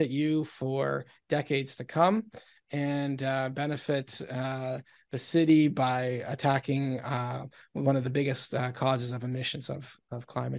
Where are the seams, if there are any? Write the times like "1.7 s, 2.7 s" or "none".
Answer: none